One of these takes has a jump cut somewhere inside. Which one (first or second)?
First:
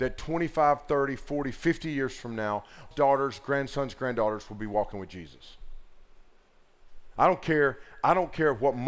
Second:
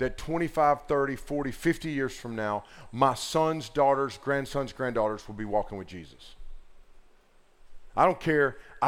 first